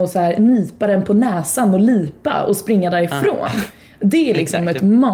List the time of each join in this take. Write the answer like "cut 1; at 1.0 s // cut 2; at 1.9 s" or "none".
none